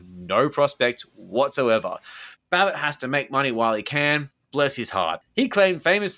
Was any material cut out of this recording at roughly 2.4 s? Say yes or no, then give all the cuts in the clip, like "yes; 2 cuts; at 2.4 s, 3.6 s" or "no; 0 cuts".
yes; 1 cut; at 2.4 s